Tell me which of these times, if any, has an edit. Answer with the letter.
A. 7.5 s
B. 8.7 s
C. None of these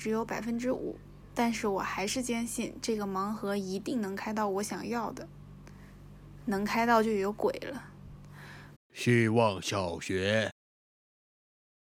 B